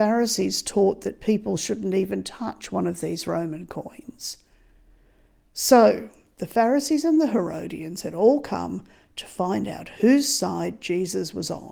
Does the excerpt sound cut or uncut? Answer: uncut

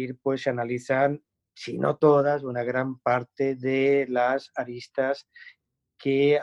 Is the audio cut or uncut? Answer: uncut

